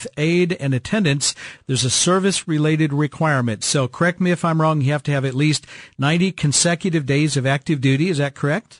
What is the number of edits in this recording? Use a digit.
0